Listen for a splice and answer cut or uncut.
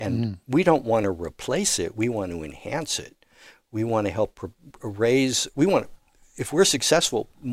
uncut